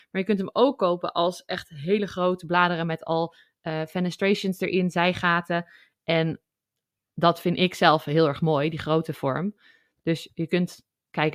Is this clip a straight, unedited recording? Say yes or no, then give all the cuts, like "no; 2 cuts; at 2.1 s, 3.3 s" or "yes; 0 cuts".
yes; 0 cuts